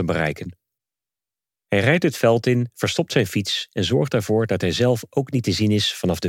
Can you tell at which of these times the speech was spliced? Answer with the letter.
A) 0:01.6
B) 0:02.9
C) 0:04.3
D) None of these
A